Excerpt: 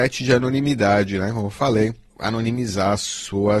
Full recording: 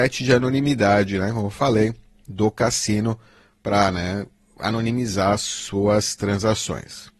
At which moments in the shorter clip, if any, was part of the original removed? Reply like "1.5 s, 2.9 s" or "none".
2.1 s